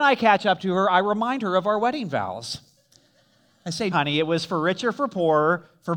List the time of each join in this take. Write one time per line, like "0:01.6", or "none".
0:03.9